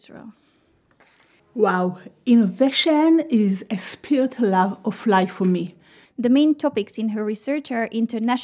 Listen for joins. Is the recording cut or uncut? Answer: cut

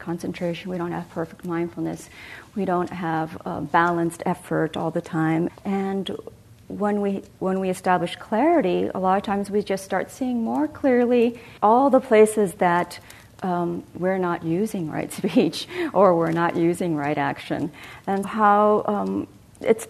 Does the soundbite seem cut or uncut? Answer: cut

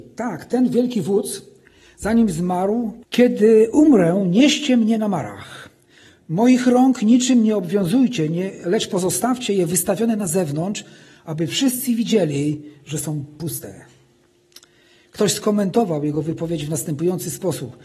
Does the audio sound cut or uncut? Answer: cut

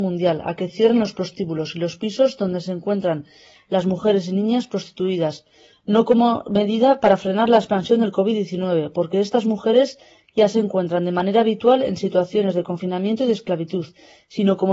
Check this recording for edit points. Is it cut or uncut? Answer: uncut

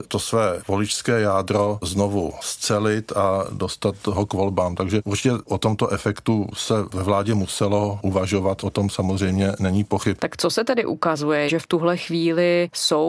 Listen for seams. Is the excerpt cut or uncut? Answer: cut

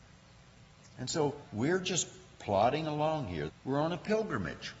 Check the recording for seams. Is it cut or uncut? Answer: cut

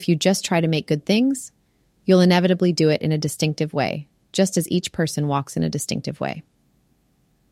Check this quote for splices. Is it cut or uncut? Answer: uncut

